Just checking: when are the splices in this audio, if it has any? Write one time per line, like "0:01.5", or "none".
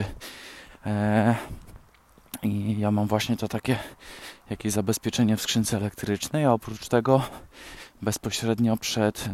none